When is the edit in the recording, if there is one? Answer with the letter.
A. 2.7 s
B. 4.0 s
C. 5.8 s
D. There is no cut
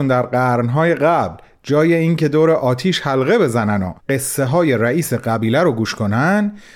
B